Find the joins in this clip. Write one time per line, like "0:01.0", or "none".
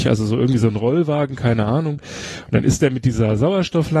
none